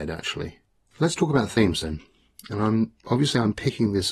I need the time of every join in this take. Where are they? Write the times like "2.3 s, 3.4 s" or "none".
0.9 s